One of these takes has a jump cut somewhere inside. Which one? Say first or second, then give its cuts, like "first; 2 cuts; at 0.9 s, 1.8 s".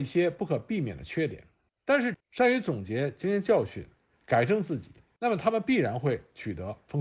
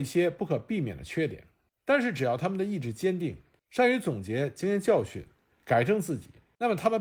first; 1 cut; at 2.1 s